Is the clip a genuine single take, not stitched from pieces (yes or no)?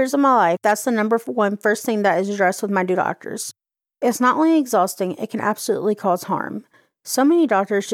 yes